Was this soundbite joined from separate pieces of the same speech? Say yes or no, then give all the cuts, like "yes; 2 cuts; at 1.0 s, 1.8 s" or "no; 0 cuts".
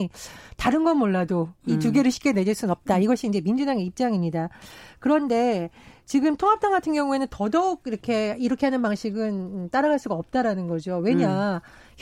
no; 0 cuts